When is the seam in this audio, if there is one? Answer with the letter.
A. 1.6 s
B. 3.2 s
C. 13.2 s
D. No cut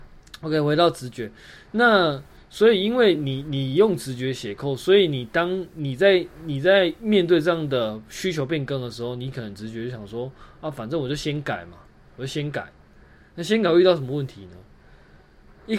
D